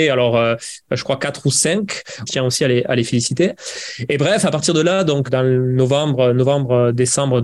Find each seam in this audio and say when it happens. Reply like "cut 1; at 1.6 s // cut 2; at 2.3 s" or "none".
cut 1; at 2.3 s // cut 2; at 5.3 s